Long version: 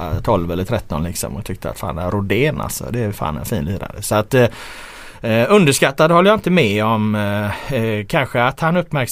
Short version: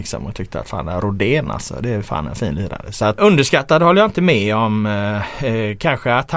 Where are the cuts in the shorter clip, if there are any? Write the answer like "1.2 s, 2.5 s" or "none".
3.2 s